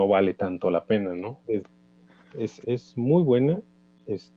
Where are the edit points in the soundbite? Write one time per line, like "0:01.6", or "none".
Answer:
0:01.4
0:02.6